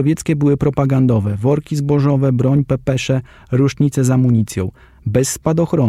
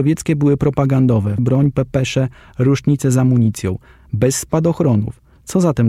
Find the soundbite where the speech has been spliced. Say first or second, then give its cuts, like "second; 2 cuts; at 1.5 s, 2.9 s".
second; 1 cut; at 1.4 s